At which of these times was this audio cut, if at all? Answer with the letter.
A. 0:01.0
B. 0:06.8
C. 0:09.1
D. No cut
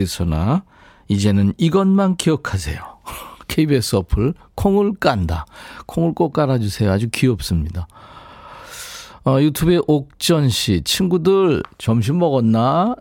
D